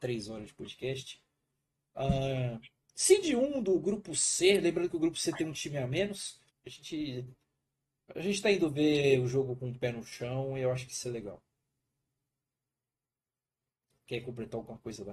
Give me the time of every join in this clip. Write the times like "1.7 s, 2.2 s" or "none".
6.5 s